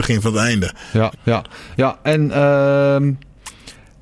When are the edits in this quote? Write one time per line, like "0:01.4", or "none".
0:01.1